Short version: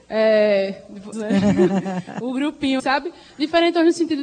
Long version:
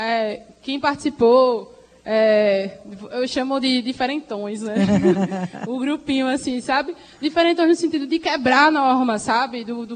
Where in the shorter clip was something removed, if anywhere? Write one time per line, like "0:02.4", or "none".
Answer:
0:01.1
0:02.8